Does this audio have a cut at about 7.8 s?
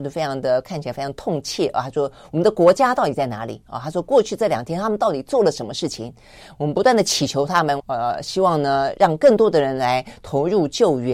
yes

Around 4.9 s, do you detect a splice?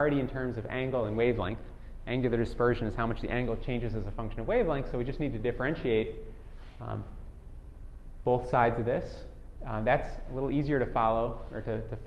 no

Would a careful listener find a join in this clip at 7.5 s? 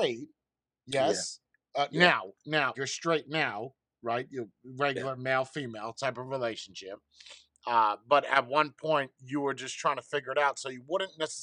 no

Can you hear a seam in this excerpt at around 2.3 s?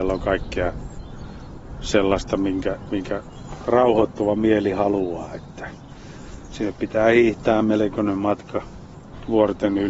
no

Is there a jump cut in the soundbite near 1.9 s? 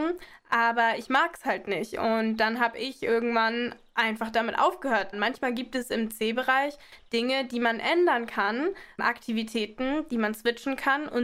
no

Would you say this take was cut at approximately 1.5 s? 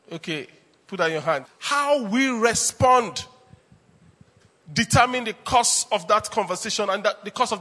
yes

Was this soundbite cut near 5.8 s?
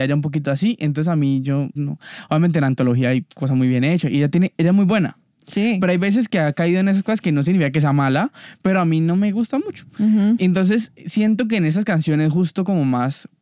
no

